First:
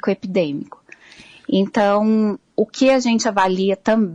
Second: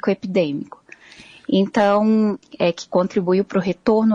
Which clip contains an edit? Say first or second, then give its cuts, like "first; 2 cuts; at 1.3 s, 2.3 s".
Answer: second; 1 cut; at 2.4 s